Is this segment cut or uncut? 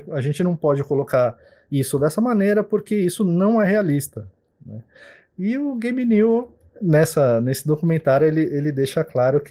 uncut